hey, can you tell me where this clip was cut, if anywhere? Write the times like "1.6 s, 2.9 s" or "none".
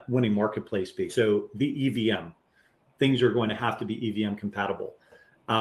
1.1 s

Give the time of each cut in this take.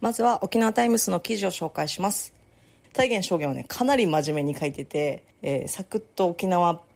2.8 s, 5.3 s

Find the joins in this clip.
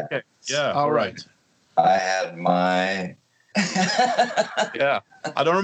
3.5 s

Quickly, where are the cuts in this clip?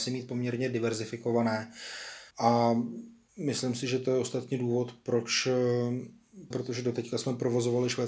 2.3 s, 6.5 s

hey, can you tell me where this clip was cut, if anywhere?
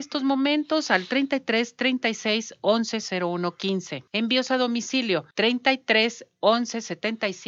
4.1 s, 5.3 s

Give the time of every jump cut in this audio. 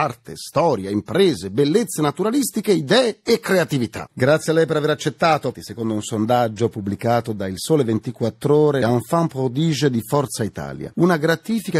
4.1 s, 5.5 s, 8.8 s

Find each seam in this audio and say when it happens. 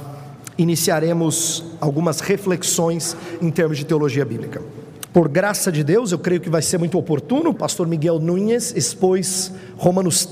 5.1 s, 7.6 s

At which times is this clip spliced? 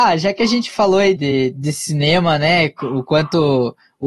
1.2 s

